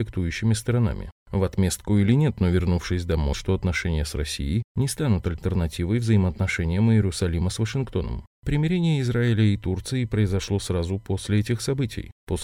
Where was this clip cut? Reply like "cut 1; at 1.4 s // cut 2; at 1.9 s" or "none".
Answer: cut 1; at 3.3 s